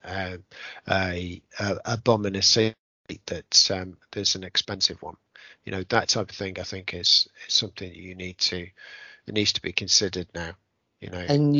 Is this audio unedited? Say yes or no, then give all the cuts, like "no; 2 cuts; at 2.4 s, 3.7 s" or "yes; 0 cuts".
yes; 0 cuts